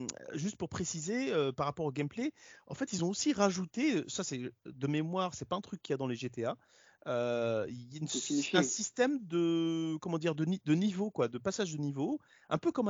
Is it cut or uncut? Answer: uncut